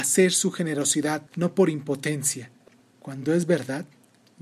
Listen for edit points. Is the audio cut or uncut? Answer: cut